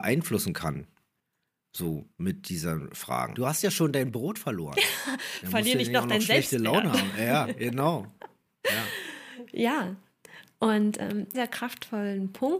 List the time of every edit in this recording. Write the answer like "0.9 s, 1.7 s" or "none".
3.3 s, 11.3 s